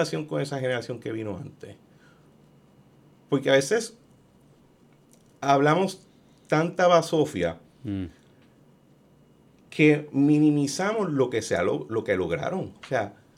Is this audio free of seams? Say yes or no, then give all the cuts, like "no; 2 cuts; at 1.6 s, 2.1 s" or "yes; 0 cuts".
yes; 0 cuts